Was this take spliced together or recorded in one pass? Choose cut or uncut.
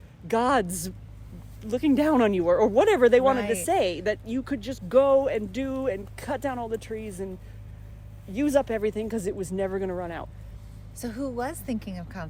uncut